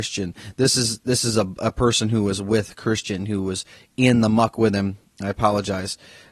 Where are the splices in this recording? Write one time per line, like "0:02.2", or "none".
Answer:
none